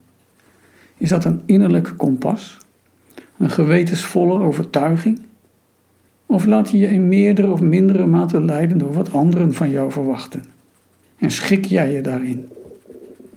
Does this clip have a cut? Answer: yes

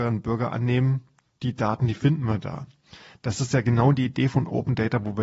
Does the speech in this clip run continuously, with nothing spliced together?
yes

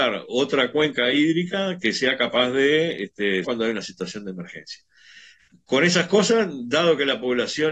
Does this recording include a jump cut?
yes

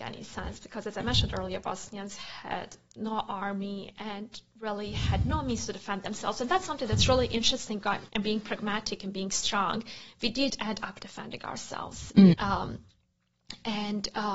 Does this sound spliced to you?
yes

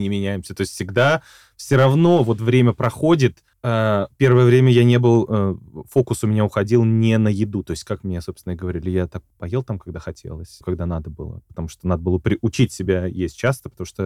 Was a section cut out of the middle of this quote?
yes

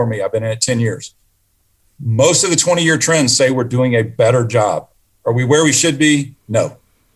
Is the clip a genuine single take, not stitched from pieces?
yes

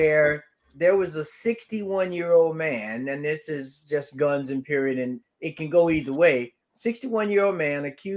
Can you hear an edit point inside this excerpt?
yes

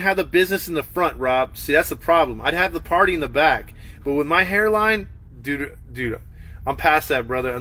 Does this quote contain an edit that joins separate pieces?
no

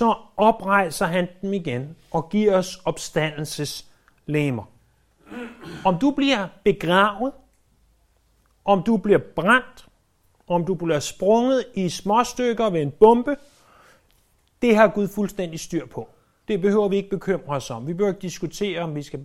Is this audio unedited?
yes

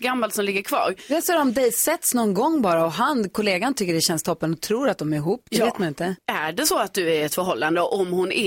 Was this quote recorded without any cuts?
no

